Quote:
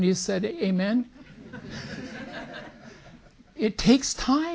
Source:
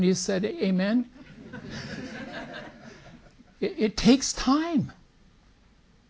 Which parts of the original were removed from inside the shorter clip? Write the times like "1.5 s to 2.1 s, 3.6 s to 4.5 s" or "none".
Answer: 3.6 s to 3.7 s